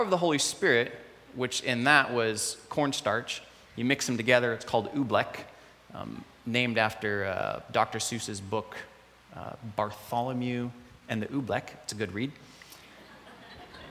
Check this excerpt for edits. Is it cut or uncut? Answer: uncut